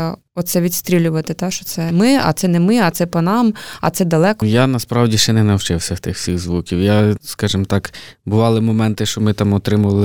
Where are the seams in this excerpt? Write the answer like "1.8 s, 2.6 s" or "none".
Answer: 4.4 s